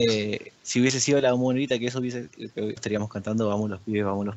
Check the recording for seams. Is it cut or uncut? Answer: cut